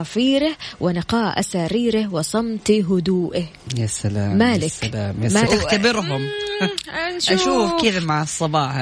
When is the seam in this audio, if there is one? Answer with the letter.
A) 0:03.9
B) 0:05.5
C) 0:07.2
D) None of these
B